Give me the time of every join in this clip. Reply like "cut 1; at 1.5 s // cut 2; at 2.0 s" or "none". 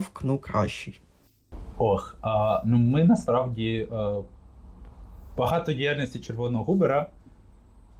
none